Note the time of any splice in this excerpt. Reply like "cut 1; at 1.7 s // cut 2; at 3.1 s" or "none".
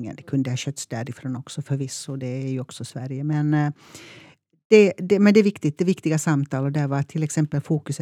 none